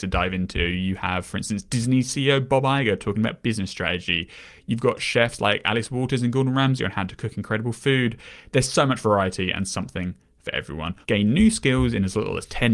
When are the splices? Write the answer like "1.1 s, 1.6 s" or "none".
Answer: 11.0 s